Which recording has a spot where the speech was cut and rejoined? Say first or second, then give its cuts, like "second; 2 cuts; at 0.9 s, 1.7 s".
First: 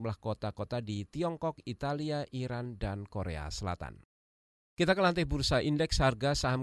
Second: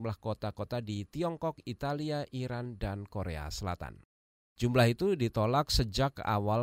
second; 1 cut; at 4.5 s